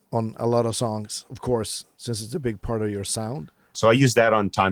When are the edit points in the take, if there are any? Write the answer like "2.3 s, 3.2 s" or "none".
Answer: 3.7 s